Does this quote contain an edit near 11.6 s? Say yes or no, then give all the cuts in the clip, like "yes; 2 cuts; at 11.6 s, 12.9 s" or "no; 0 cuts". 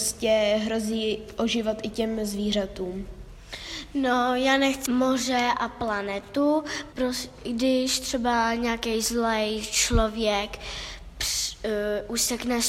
no; 2 cuts; at 4.9 s, 6.9 s